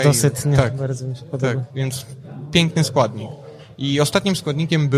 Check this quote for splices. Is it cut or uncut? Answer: cut